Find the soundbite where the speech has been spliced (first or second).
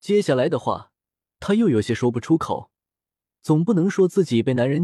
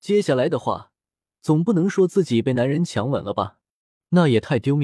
second